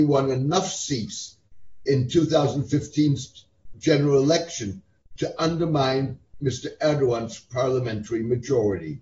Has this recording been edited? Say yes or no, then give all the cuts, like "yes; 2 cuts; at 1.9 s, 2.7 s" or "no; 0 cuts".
no; 0 cuts